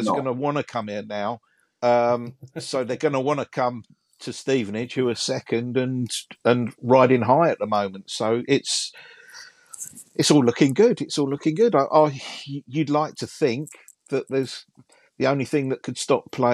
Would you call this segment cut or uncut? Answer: cut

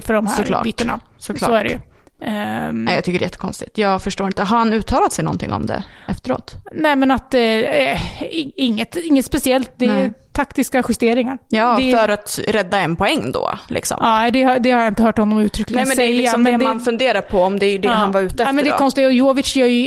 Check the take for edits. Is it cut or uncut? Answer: uncut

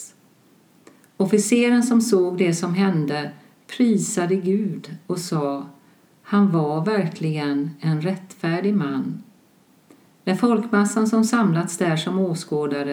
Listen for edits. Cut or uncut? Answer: uncut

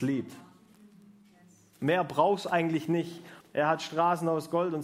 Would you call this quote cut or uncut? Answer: cut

